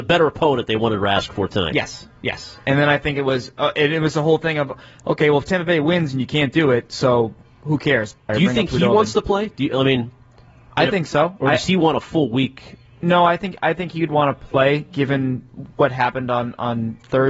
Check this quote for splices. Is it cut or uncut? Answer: cut